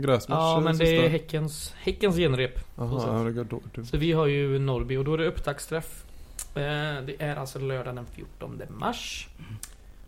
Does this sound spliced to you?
no; 0 cuts

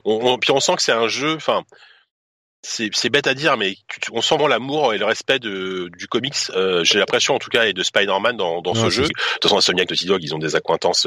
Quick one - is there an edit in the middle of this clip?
yes; 2 cuts; at 4.4 s, 9.1 s

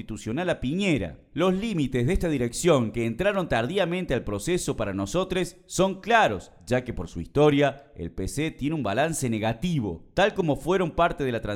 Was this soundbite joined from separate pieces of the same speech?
no; 0 cuts

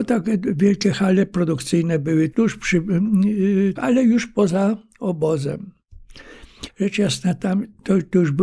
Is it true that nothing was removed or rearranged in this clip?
no; 3 cuts; at 2.3 s, 3.8 s, 6.7 s

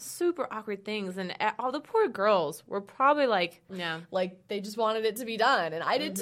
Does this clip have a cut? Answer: yes; 1 cut; at 3.7 s

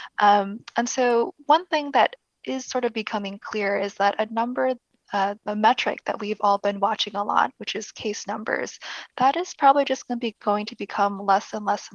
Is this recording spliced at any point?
no; 0 cuts

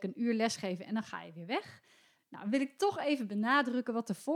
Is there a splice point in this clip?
yes; 1 cut; at 2.2 s

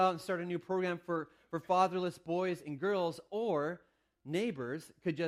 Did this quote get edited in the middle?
no; 0 cuts

